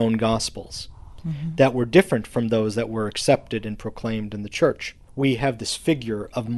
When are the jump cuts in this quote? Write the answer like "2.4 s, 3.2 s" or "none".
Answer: 5.1 s